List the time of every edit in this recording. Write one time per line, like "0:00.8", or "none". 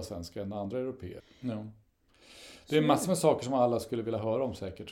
0:01.2